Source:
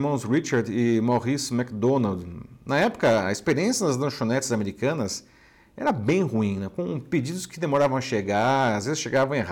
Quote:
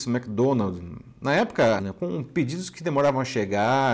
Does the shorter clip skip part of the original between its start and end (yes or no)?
yes